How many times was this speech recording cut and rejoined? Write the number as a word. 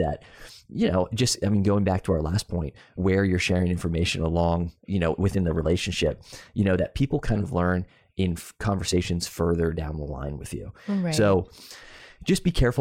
zero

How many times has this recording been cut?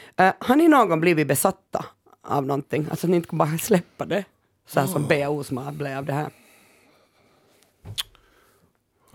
zero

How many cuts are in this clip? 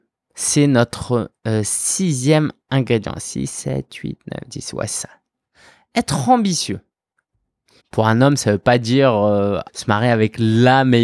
two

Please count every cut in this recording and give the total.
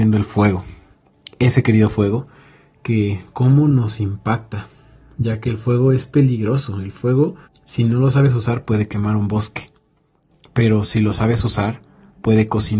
one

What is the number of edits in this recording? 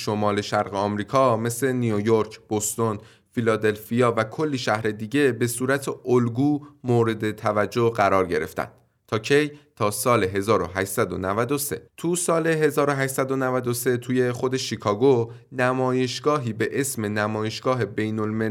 one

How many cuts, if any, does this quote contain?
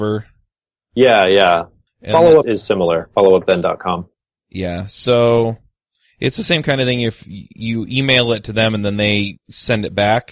one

